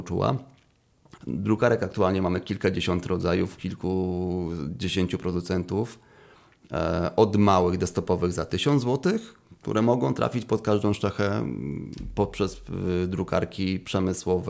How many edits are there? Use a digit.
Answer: 1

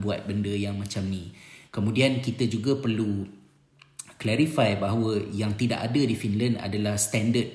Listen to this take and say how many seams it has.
1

